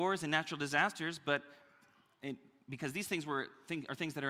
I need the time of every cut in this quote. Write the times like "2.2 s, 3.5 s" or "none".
none